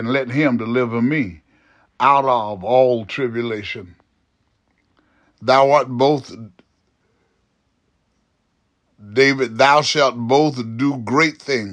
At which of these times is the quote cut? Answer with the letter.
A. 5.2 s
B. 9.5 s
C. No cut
A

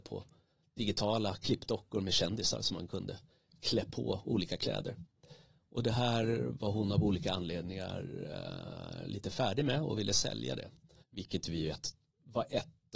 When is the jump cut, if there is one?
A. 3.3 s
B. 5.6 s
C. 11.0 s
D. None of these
C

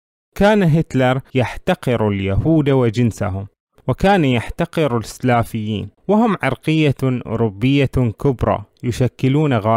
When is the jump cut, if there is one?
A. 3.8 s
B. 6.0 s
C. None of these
B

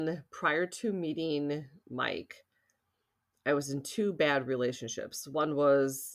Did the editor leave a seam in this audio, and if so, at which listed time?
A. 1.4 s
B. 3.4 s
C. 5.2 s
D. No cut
D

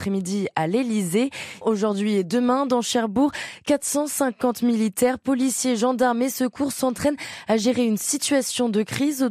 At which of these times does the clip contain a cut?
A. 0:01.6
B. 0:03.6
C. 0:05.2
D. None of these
A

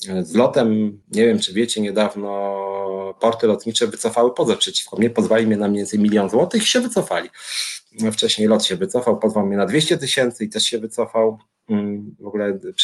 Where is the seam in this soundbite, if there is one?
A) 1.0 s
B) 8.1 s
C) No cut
A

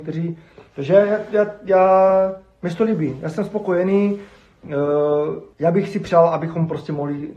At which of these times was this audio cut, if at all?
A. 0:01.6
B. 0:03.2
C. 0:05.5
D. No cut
C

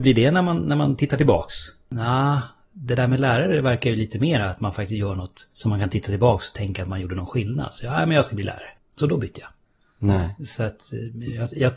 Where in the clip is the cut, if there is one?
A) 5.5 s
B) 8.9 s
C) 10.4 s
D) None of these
A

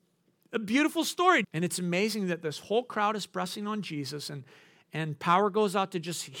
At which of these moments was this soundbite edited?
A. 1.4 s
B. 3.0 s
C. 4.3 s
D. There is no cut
A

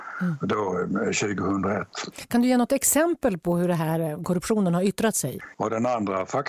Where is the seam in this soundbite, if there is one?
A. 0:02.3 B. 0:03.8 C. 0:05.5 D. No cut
C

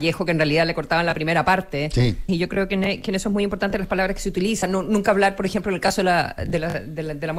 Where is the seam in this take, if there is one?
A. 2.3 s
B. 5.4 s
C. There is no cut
A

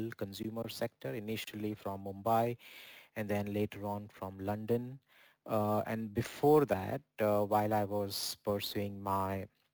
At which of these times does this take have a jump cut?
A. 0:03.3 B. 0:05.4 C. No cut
B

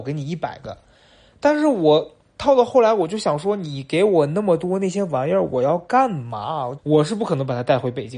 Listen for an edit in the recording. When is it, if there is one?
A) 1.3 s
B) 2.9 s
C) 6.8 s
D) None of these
C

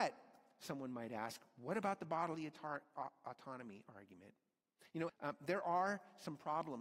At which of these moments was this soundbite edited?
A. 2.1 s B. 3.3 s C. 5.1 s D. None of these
C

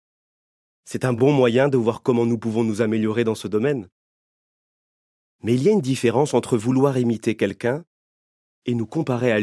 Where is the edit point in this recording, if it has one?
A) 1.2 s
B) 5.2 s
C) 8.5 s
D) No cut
D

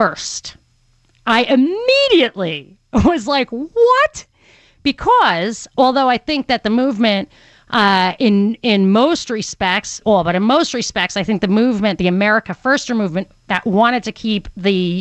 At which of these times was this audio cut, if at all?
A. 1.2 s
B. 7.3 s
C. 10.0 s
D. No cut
C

